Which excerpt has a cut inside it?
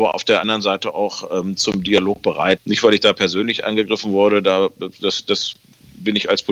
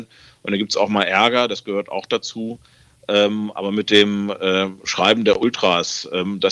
first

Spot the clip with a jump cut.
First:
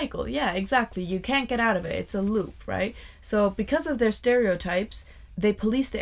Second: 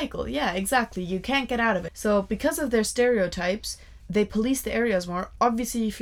second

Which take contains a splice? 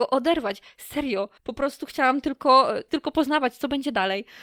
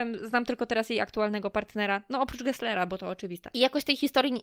first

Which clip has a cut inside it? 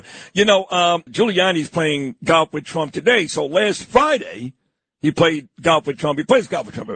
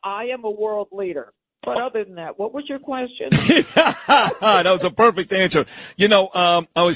first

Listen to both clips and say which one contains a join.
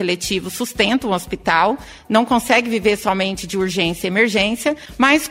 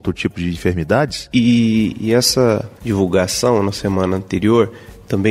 second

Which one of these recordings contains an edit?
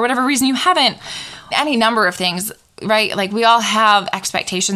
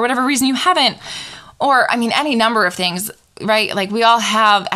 first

